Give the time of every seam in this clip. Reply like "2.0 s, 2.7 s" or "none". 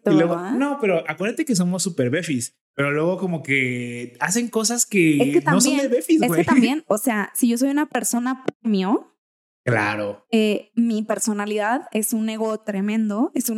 none